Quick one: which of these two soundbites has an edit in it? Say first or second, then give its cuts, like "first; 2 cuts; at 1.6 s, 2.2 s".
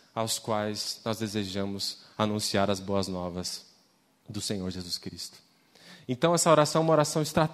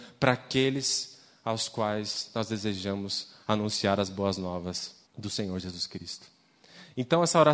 second; 1 cut; at 5.1 s